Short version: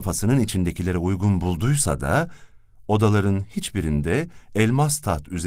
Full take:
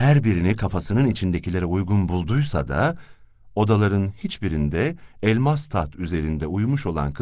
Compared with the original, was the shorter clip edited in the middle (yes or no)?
no